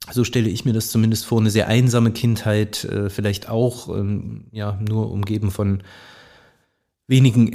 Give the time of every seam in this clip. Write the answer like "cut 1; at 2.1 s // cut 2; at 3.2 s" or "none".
none